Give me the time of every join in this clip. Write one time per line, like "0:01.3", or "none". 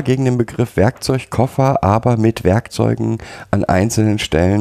none